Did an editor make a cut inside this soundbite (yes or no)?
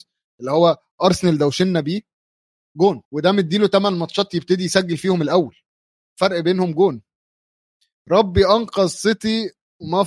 yes